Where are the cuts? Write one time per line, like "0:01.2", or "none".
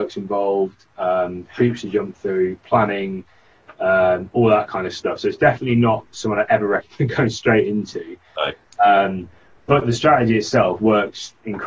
none

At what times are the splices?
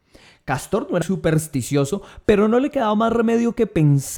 0:01.0

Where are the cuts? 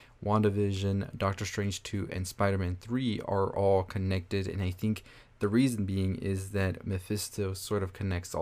none

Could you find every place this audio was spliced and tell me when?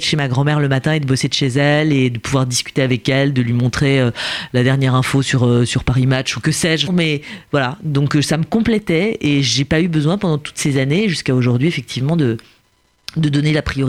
0:06.9

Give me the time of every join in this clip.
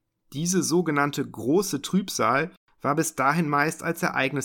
none

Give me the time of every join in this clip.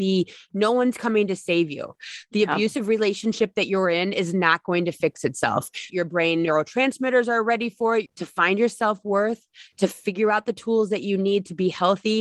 0:05.9
0:08.1

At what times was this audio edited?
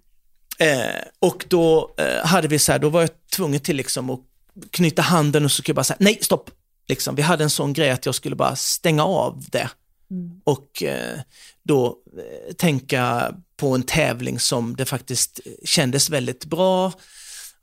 none

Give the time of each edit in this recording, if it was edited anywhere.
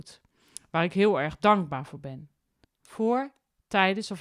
0:02.6

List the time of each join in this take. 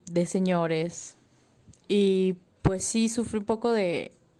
none

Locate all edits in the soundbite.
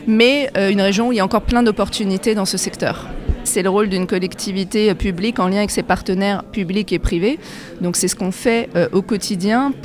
0:03.5

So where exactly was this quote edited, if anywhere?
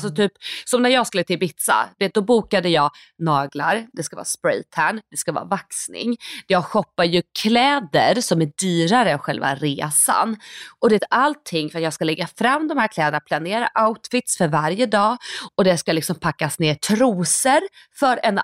none

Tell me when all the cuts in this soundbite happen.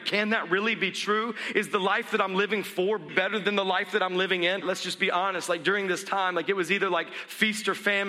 0:03.1
0:04.6

